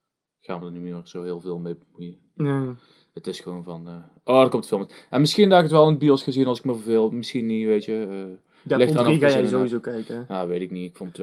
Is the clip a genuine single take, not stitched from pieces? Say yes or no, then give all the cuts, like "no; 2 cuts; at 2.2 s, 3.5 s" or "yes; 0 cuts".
yes; 0 cuts